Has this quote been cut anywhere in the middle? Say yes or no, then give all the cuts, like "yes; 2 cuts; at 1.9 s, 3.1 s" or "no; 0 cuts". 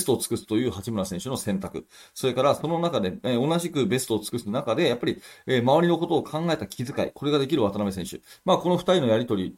no; 0 cuts